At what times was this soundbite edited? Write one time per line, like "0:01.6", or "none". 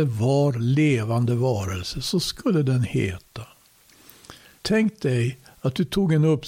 0:04.6